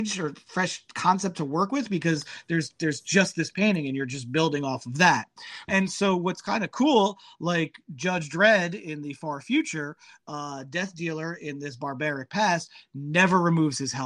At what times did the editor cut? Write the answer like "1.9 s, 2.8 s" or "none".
5.7 s